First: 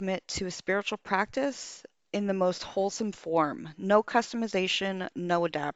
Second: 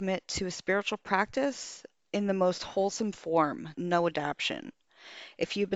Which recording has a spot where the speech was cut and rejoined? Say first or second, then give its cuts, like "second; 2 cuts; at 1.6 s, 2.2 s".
second; 1 cut; at 3.7 s